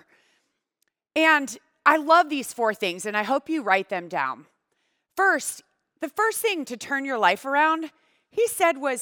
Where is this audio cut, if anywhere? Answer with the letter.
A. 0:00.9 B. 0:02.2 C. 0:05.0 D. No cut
D